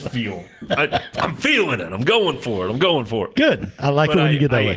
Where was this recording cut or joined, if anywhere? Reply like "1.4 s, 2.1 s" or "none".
none